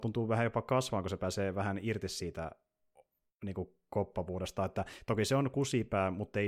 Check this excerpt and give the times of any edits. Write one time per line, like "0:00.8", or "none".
none